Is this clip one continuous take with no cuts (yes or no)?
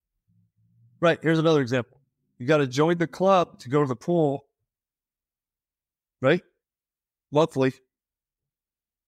yes